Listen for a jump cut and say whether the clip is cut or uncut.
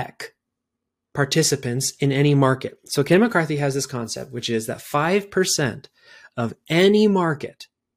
uncut